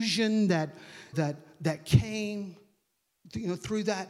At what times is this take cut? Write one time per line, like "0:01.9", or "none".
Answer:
0:01.1

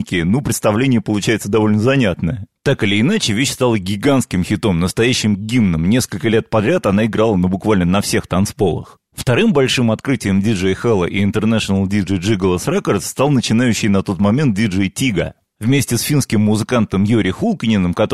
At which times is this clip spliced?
none

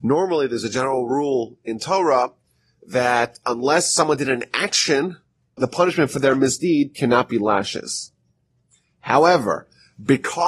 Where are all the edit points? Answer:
0:05.6

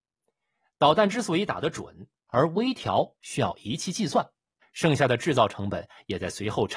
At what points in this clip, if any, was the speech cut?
0:02.3
0:04.6

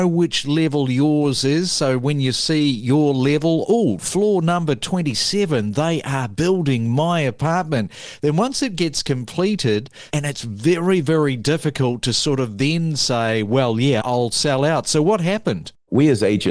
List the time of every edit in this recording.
0:10.1
0:14.0

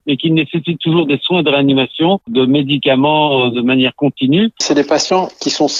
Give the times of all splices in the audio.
0:04.6

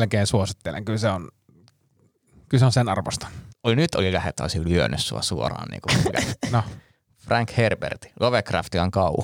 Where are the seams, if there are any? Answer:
0:03.5

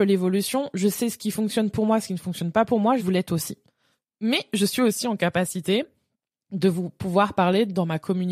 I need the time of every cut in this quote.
0:03.0

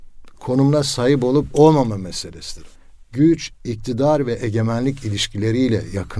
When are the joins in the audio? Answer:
none

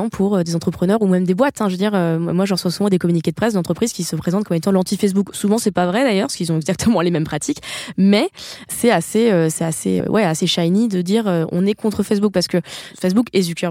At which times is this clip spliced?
0:10.0

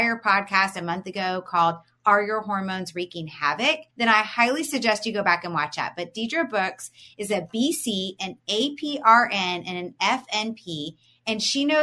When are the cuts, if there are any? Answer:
0:03.9

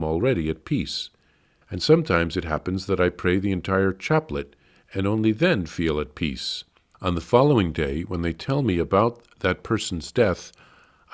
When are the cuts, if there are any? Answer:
0:01.6
0:06.9

